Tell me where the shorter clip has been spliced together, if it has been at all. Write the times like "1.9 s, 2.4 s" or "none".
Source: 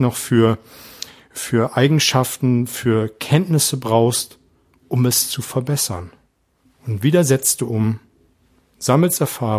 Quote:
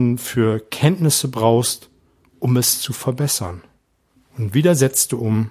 none